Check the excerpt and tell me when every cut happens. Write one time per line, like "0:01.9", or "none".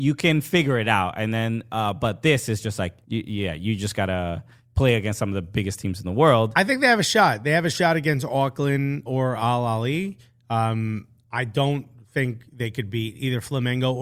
0:03.0
0:09.1